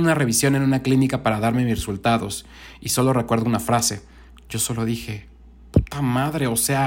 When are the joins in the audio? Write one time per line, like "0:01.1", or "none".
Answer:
0:04.3